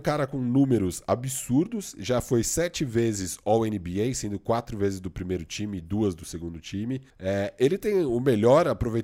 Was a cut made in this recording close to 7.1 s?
yes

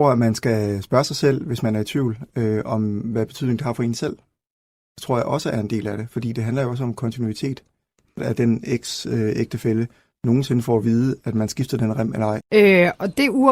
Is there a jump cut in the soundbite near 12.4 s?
yes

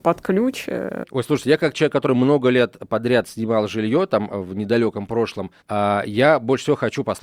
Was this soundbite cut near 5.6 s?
yes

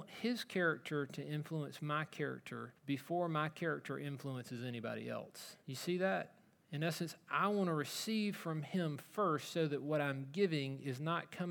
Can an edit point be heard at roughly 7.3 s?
no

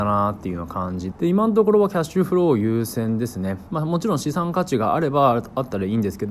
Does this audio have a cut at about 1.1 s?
yes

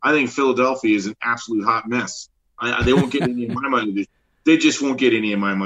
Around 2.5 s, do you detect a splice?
no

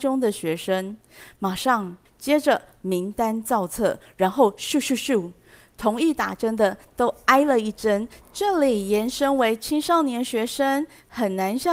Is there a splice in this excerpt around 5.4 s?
no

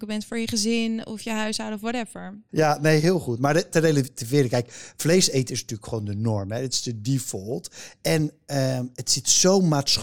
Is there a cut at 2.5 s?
yes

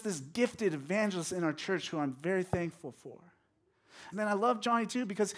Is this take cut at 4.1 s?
yes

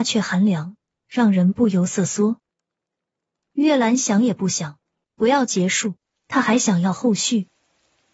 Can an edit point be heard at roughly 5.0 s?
yes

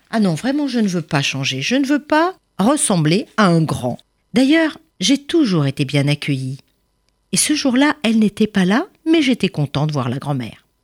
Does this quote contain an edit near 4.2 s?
yes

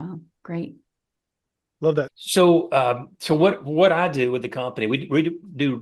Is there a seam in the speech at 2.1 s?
yes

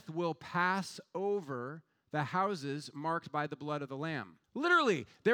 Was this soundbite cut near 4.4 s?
yes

